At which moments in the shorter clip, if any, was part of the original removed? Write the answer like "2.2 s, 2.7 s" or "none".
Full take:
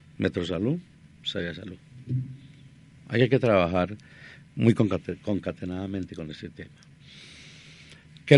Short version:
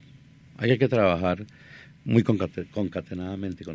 none